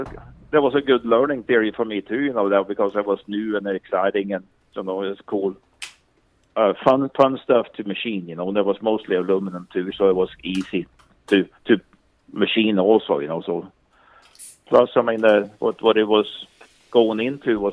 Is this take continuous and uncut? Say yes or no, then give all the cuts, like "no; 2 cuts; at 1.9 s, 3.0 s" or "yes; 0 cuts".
no; 1 cut; at 11.6 s